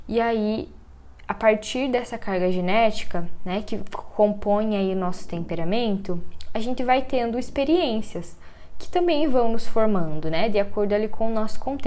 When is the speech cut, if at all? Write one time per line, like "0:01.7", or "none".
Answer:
none